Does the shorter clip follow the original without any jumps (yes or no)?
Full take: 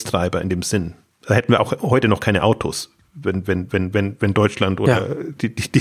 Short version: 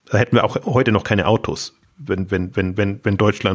yes